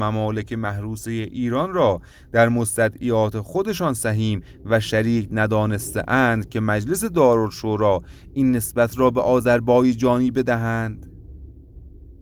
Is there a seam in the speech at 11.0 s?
no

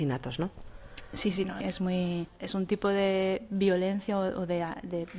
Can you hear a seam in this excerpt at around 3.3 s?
no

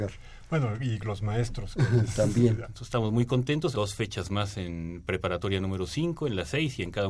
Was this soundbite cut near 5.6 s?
no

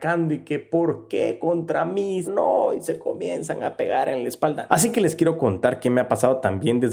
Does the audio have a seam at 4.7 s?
yes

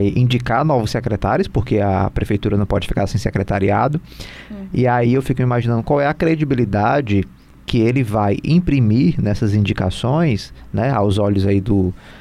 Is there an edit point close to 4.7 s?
no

